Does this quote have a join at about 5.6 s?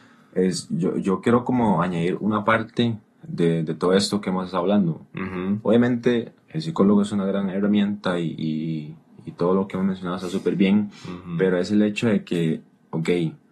no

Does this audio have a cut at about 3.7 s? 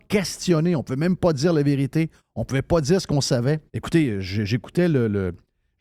yes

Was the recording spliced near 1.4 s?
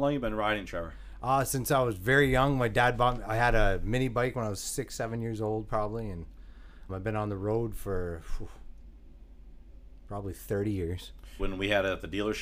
no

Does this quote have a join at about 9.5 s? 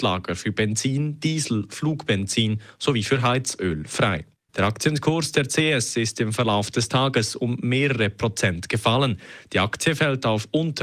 no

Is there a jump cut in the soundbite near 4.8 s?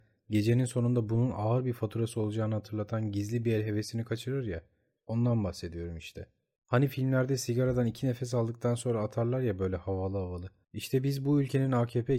no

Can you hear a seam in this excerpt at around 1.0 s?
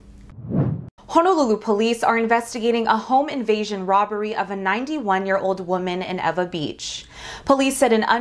yes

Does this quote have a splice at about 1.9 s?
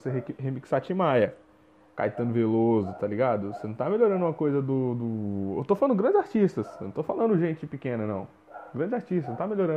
yes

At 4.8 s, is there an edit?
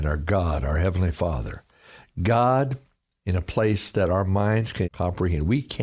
yes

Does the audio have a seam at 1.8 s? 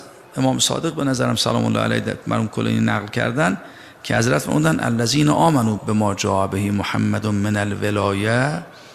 no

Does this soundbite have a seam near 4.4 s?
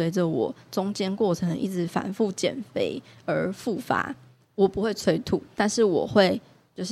yes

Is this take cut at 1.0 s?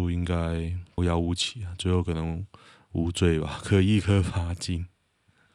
yes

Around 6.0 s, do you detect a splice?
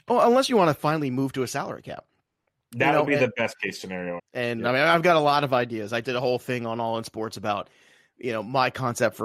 yes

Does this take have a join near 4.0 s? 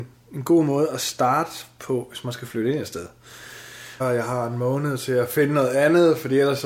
yes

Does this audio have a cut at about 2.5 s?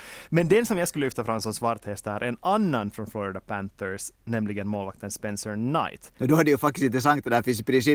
no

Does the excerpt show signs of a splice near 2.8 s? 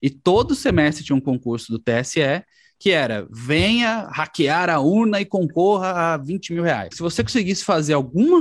no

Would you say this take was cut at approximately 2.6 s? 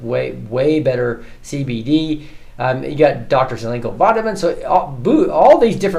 no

